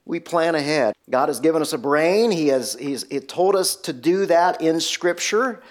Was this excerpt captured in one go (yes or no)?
no